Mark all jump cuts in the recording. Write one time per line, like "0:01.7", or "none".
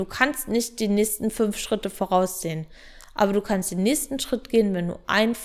none